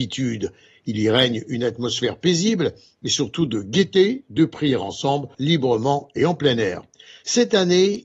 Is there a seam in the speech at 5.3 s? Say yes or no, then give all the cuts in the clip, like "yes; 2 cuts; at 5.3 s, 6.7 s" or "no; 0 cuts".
yes; 1 cut; at 5.3 s